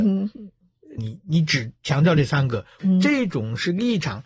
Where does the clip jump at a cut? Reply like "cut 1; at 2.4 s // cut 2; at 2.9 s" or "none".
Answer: cut 1; at 1.0 s // cut 2; at 2.8 s